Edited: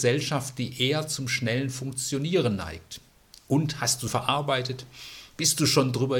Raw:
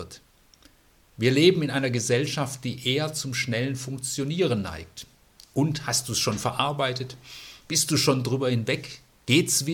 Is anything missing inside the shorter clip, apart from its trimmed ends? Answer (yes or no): yes